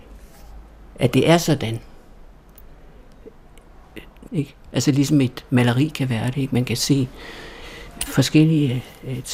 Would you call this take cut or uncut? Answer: cut